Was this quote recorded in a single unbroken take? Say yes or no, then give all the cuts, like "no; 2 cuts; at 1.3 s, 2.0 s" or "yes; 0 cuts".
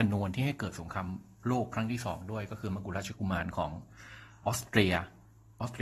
no; 1 cut; at 4.4 s